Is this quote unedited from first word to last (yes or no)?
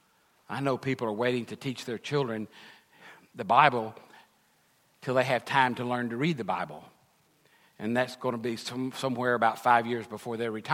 yes